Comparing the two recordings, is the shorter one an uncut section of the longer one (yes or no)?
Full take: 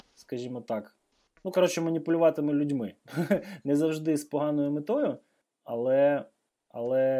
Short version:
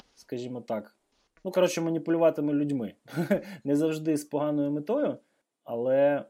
yes